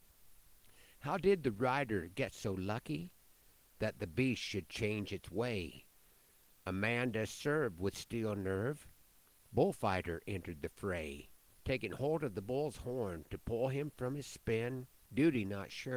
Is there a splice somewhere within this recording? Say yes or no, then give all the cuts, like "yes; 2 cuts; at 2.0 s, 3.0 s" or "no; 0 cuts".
no; 0 cuts